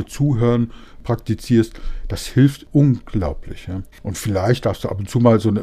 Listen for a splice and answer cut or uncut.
cut